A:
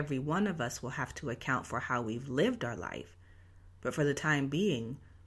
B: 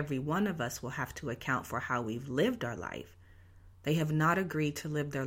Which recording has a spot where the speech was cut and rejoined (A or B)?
B